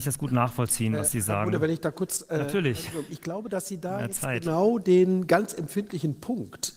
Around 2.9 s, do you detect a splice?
no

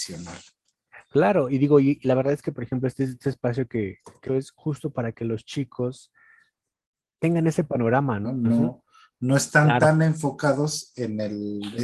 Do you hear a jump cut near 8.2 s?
yes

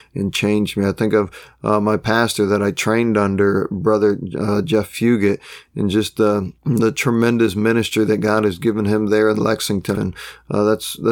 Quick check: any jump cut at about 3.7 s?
no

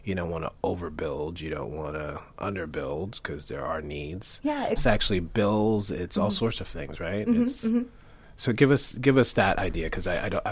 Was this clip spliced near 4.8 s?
yes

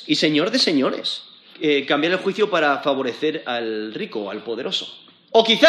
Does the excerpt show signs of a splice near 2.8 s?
no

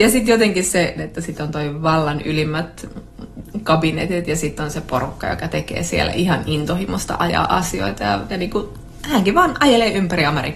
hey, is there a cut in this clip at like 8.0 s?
no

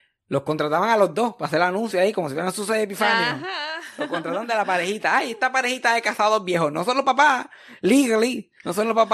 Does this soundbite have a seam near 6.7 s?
no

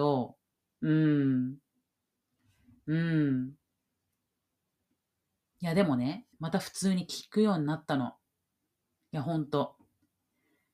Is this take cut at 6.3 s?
yes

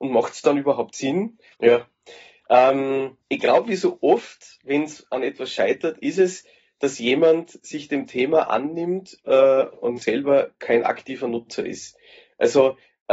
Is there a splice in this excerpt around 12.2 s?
no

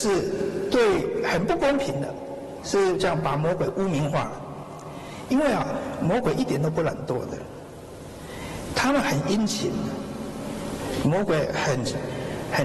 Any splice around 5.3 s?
no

